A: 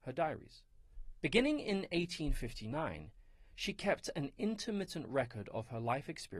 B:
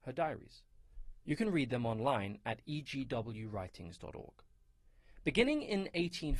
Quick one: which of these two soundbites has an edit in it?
A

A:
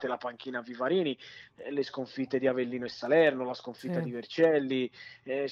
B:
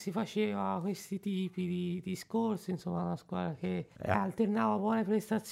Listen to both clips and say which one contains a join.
B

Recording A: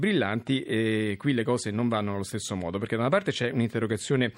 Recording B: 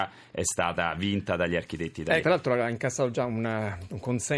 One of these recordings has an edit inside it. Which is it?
B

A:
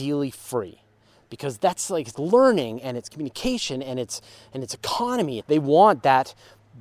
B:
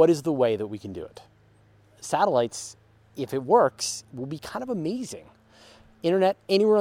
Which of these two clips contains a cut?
A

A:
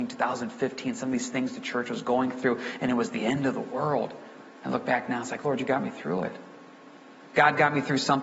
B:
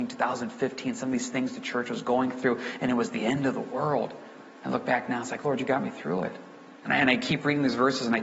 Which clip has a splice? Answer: B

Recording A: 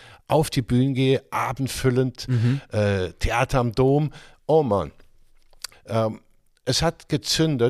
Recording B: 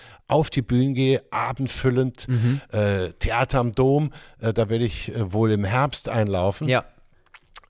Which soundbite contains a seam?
A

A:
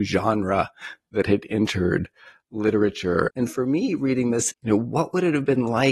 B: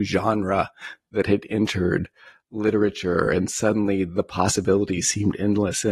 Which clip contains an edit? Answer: A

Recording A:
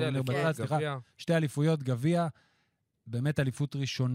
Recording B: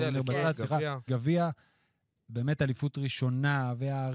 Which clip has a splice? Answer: B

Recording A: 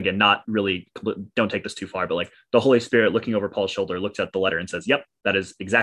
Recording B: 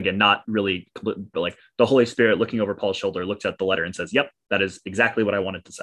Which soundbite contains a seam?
B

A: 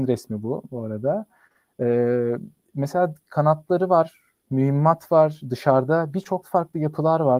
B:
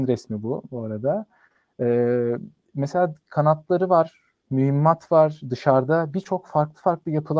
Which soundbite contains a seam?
A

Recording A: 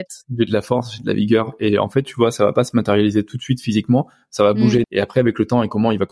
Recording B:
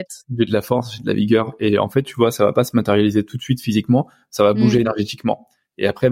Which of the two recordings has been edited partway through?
A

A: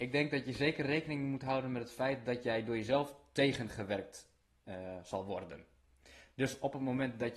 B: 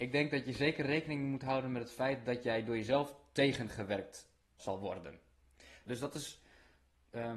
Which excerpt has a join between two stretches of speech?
B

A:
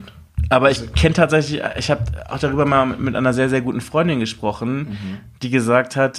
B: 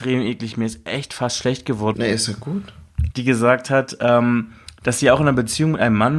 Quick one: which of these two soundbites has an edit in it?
B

